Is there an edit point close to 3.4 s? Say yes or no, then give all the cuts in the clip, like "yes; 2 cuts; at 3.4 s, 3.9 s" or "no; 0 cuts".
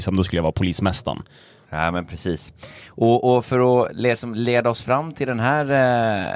no; 1 cut; at 1.6 s